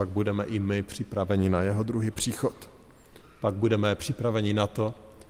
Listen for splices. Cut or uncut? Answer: uncut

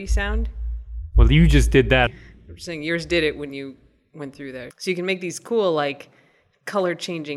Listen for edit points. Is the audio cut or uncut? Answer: cut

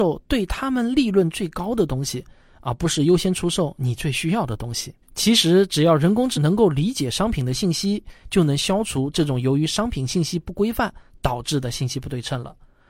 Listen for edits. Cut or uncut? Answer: cut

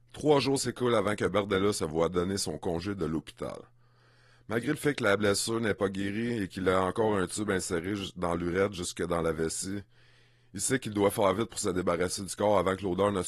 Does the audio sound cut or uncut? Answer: uncut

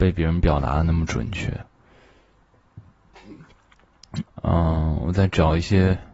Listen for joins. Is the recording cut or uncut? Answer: cut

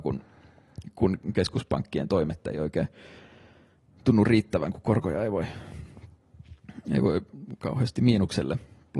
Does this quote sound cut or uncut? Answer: uncut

